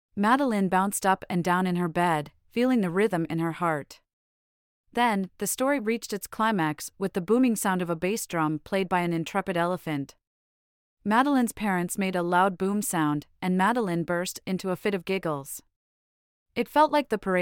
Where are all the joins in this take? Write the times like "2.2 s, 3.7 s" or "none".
none